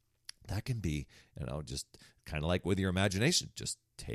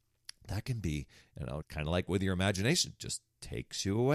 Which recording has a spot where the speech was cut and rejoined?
second; 1 cut; at 1.6 s

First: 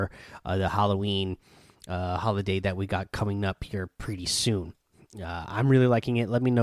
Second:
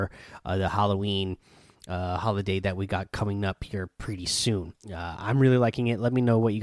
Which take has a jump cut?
second; 1 cut; at 4.8 s

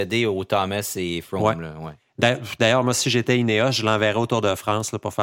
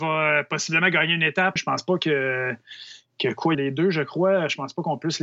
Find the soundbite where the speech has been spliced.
second; 2 cuts; at 1.6 s, 3.5 s

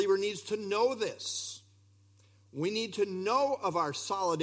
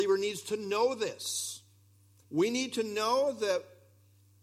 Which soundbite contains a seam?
second; 1 cut; at 2.2 s

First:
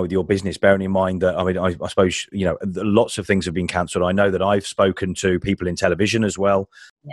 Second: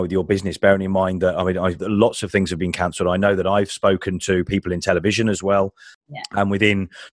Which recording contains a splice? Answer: second; 1 cut; at 1.8 s

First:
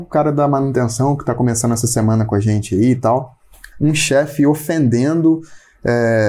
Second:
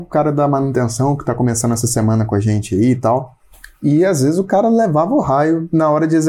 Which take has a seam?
first; 1 cut; at 3.7 s

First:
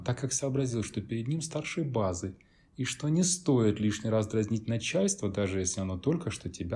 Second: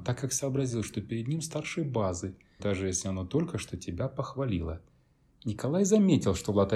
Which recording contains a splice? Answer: second; 1 cut; at 2.6 s

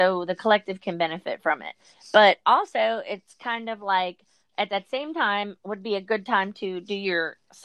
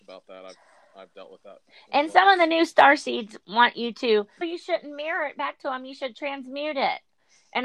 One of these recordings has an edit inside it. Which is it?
second; 1 cut; at 4.4 s

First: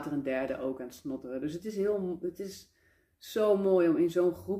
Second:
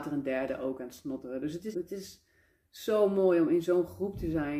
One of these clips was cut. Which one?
second; 1 cut; at 1.7 s

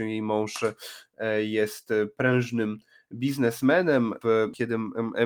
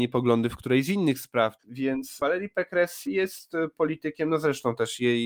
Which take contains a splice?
second; 2 cuts; at 1.6 s, 3.1 s

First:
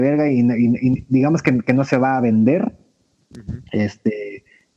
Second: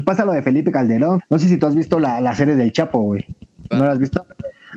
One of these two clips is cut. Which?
second; 2 cuts; at 1.2 s, 3.7 s

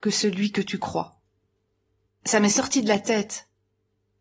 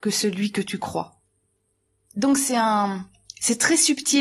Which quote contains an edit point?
first; 1 cut; at 2.1 s

